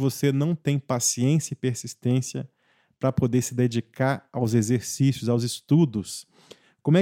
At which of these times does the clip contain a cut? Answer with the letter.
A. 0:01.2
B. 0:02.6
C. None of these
C